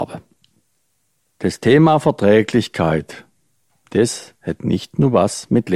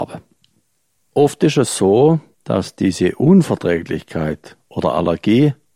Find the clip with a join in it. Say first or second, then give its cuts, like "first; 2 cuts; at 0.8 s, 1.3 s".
second; 1 cut; at 1.0 s